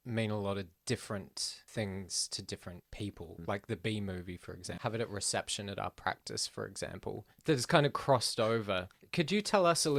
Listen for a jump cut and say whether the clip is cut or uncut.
cut